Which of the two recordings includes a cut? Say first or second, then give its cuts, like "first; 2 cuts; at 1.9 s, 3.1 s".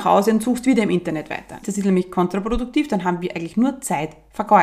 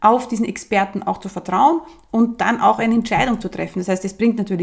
first; 1 cut; at 1.6 s